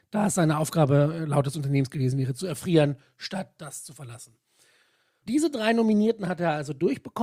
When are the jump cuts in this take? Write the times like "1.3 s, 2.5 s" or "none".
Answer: 5.2 s